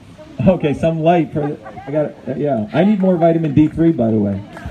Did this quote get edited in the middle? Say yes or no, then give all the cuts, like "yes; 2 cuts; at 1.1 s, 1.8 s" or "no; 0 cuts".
yes; 1 cut; at 1.9 s